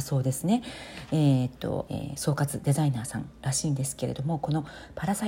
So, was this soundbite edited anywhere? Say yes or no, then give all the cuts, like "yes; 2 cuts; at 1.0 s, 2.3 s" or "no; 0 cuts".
yes; 1 cut; at 1.9 s